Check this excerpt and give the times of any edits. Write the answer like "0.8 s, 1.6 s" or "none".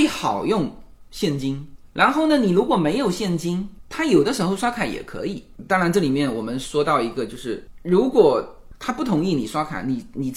none